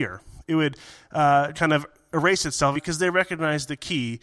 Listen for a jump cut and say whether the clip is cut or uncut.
cut